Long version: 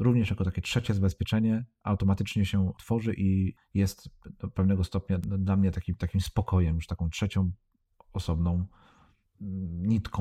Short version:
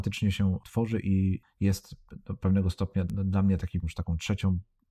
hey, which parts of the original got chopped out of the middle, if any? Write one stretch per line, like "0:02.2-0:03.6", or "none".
0:06.0-0:06.7

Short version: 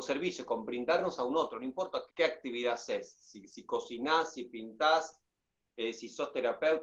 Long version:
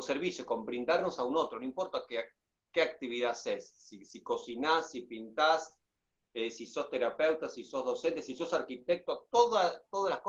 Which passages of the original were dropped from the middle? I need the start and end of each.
0:02.1-0:02.6

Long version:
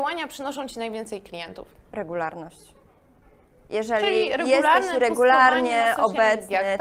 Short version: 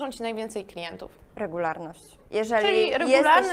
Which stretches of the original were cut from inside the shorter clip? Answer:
0:02.8-0:03.6

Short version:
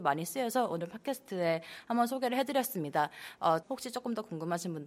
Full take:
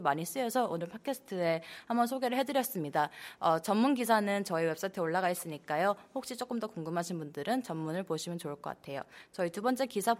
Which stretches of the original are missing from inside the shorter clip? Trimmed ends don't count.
0:03.6-0:06.1

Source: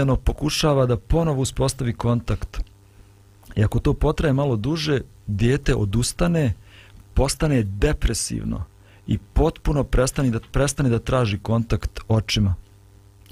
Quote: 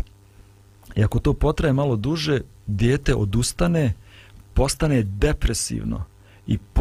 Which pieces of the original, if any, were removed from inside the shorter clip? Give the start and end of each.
none

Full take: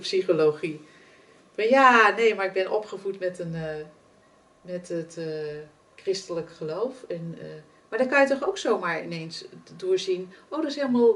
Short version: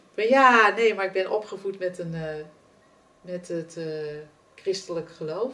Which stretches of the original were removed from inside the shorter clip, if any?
none

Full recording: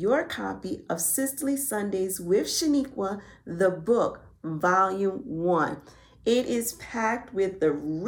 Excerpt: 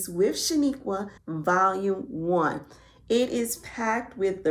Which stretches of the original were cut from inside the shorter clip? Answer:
0:03.3-0:04.3

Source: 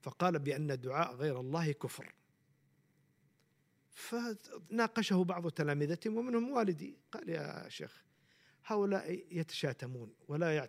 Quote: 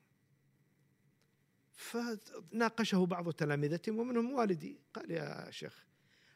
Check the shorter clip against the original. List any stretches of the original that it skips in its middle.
none

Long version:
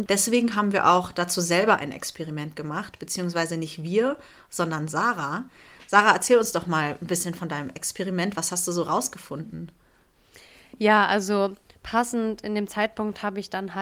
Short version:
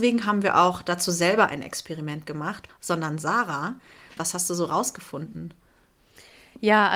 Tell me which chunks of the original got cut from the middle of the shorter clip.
0:03.0-0:04.4
0:05.9-0:08.3

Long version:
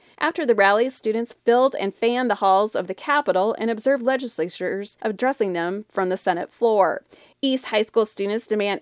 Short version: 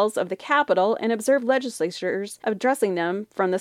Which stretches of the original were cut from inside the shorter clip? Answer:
none

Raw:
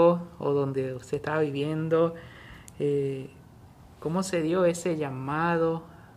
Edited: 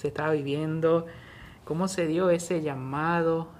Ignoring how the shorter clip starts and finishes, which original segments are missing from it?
0:02.7-0:03.9

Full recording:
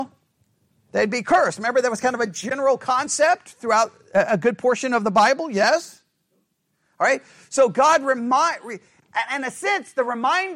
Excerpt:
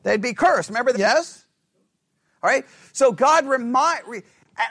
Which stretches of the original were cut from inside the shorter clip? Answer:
0:01.8-0:05.5

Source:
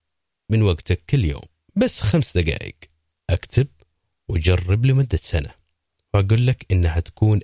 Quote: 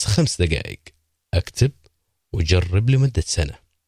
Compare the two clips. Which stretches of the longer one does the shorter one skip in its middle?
none

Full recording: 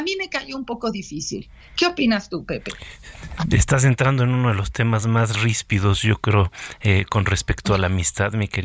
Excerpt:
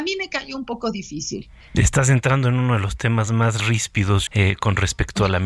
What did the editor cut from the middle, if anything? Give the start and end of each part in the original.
0:01.7-0:03.5
0:06.0-0:06.8

